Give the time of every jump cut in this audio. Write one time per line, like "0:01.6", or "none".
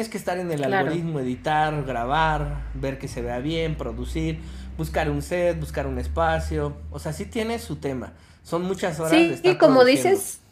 none